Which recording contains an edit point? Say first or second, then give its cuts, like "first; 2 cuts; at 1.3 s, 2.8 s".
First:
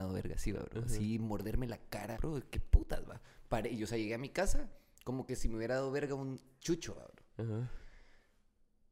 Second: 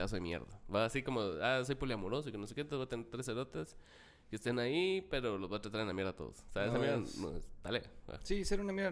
first; 1 cut; at 2.1 s